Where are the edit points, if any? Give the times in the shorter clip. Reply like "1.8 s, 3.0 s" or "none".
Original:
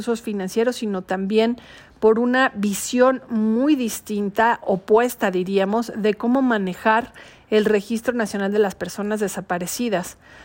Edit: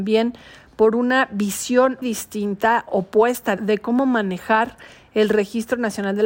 2.0 s, 3.6 s